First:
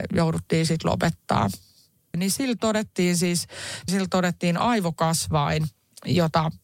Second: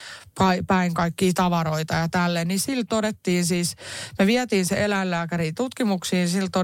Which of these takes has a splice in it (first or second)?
first